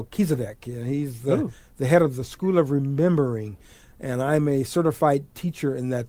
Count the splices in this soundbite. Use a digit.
0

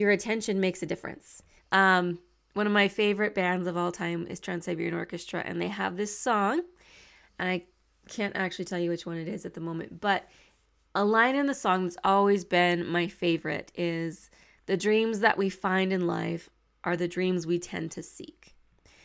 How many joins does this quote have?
1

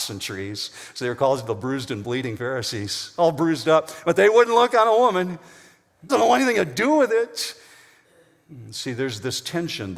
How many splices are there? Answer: 1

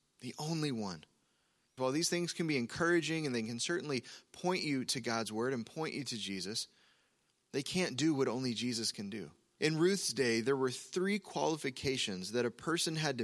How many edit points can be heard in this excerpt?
2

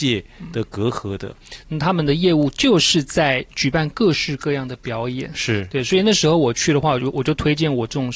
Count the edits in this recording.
1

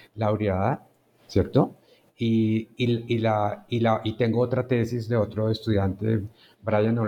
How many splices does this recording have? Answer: 0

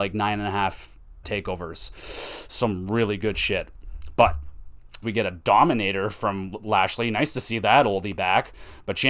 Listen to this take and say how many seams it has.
2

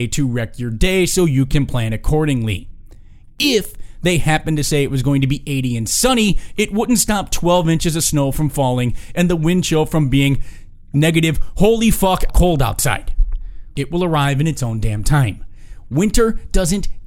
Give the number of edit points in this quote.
2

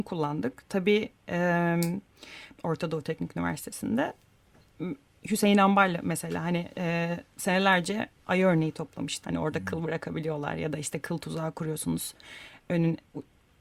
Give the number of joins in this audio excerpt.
2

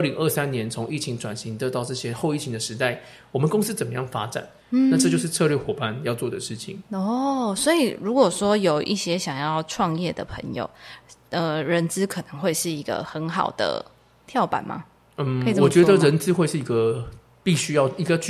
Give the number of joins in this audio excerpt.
0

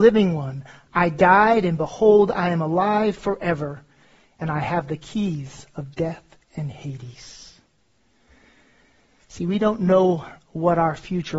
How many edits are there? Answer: 0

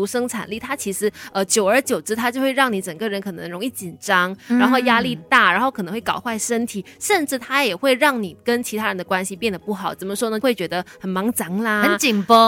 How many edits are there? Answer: 1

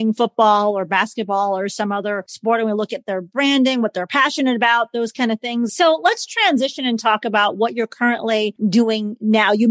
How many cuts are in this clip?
1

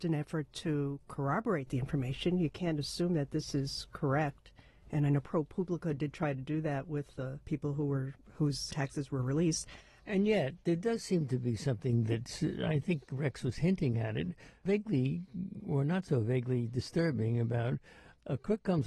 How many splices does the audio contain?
2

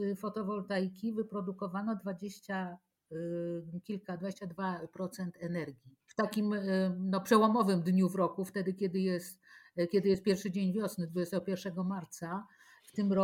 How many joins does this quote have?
1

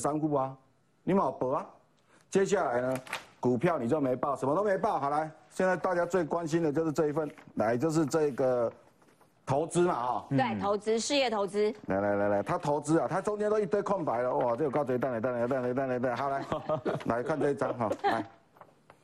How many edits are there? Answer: 0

